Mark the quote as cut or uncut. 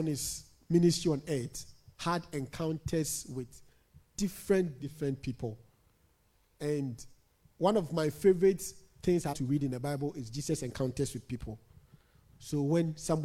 cut